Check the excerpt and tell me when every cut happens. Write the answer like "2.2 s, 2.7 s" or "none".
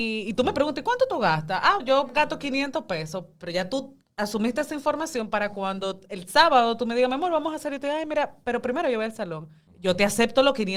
1.8 s, 9.7 s